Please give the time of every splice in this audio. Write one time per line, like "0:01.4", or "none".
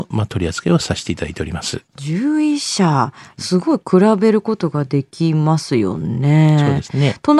none